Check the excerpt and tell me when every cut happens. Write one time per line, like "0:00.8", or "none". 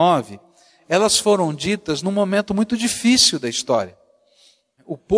none